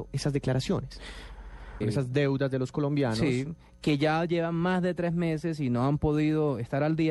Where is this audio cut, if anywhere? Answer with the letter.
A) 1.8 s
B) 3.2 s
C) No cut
A